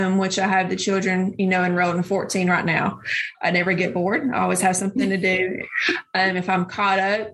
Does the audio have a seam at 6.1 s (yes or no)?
no